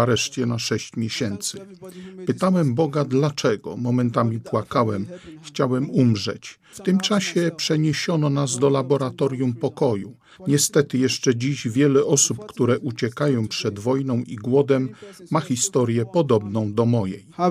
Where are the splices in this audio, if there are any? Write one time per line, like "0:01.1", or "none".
0:06.7
0:10.4